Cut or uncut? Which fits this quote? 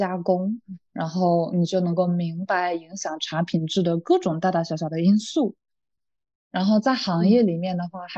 uncut